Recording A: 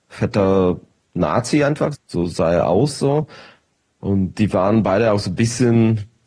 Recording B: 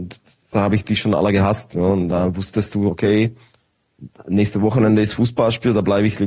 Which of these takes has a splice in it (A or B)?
A